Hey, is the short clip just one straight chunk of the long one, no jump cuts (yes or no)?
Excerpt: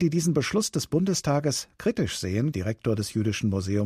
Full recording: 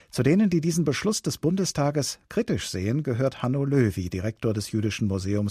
no